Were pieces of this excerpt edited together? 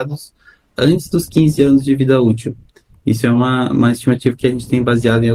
no; 0 cuts

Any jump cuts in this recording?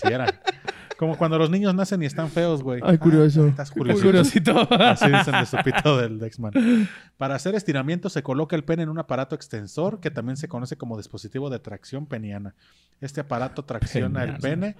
no; 0 cuts

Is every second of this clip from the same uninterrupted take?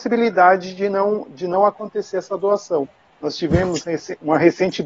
yes; 0 cuts

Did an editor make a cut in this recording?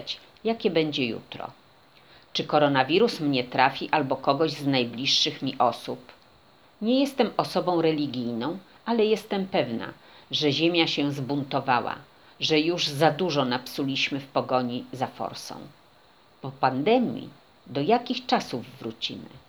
yes; 1 cut; at 6.7 s

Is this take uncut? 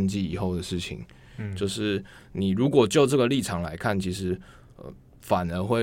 yes; 0 cuts

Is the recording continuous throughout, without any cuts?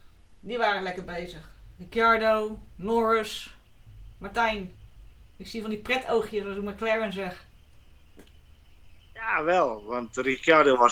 yes; 0 cuts

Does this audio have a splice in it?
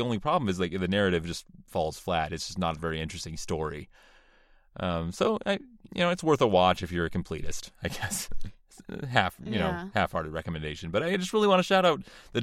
no; 0 cuts

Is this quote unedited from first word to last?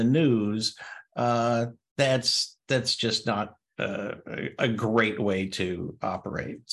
yes; 0 cuts

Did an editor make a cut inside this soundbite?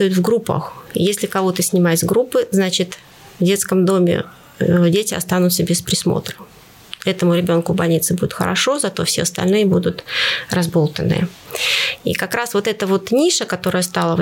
no; 0 cuts

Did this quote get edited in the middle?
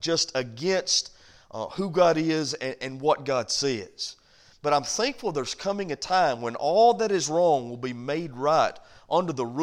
no; 0 cuts

